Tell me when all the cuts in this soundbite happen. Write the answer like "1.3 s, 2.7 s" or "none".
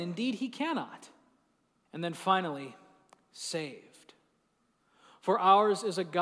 1.9 s